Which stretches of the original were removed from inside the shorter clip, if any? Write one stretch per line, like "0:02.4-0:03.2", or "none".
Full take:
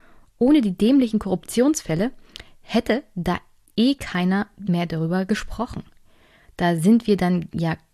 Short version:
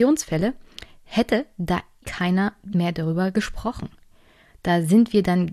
0:03.6-0:04.0